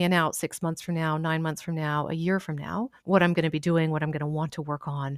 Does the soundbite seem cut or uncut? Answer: cut